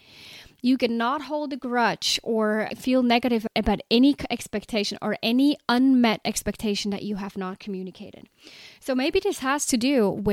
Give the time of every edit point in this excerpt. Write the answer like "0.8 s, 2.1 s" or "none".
2.7 s